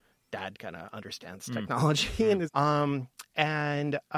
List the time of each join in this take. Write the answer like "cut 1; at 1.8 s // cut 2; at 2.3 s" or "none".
cut 1; at 2.5 s